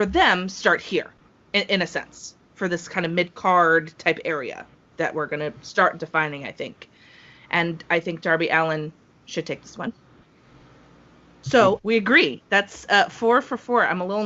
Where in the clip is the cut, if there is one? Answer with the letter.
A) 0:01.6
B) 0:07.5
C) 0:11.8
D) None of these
C